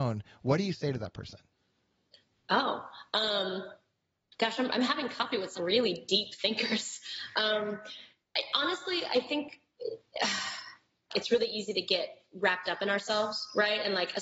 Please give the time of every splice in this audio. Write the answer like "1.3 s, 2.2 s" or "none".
5.6 s